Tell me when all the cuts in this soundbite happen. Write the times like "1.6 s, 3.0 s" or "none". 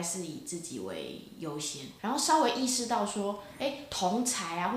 2.0 s